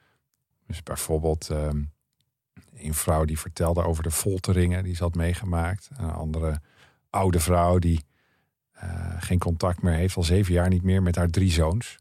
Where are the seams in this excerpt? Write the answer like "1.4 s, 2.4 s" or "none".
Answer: none